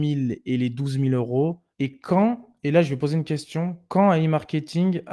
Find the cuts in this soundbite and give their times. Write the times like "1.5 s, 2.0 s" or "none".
1.7 s